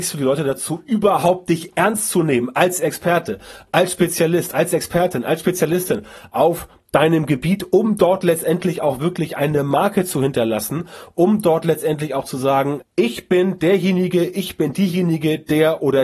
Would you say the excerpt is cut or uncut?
cut